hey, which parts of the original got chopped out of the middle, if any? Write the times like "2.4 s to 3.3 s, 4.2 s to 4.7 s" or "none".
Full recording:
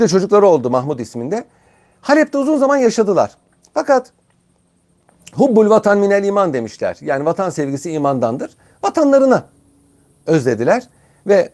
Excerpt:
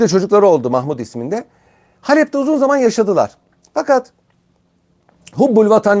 none